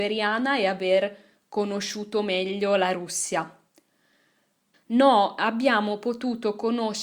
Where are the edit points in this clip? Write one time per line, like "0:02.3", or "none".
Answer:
0:04.7